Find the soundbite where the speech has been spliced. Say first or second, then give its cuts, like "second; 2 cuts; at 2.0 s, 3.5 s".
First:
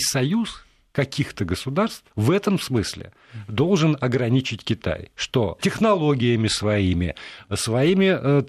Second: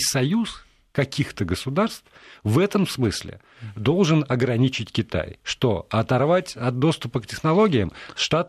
first; 2 cuts; at 2.1 s, 5.6 s